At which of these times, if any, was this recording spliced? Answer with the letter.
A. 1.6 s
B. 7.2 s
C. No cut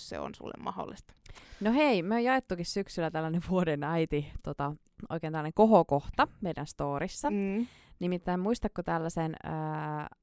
C